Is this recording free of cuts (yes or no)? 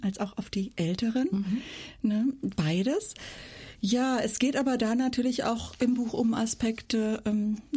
yes